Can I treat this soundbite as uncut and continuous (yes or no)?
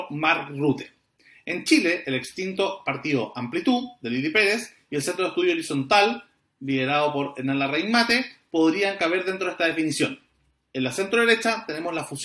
yes